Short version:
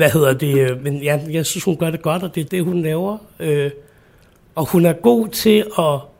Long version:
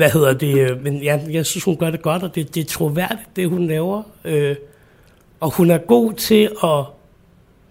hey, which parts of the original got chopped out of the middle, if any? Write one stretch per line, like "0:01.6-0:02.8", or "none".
0:02.5-0:03.3